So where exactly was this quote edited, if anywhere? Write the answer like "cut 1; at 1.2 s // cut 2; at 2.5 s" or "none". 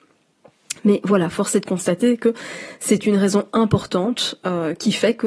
none